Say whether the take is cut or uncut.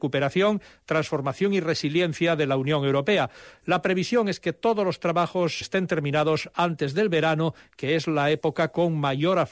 cut